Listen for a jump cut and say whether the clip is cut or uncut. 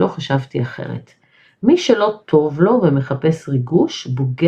uncut